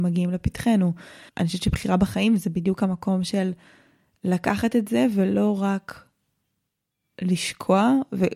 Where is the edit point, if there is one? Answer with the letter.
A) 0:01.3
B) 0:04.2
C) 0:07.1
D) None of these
A